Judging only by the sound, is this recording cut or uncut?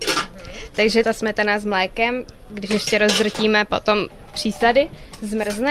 uncut